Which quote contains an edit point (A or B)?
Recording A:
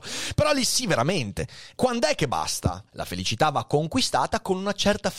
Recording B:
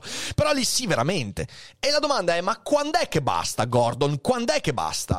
A